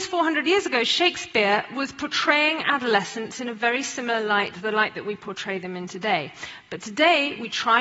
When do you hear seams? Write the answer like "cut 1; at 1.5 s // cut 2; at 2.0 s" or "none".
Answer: none